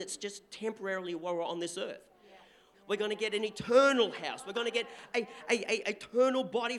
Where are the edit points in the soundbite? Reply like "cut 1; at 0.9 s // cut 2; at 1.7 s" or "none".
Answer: cut 1; at 2.7 s